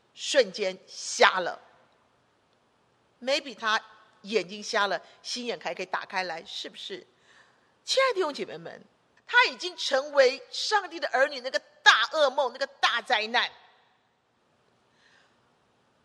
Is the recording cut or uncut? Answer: cut